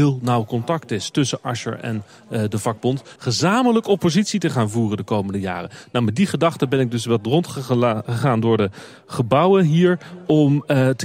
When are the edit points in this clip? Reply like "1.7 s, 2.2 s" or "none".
3.2 s